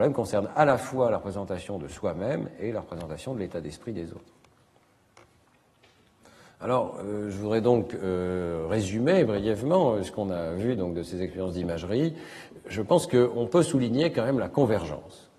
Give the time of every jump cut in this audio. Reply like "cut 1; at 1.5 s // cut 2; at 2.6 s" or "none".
none